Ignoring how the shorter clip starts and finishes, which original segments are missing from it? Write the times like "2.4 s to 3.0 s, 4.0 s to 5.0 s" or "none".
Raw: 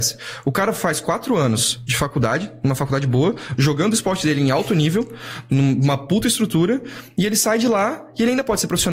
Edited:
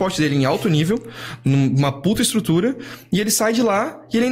none